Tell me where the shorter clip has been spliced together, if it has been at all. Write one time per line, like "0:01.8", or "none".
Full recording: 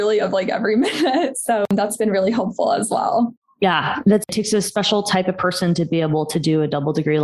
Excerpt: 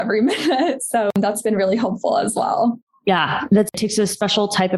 none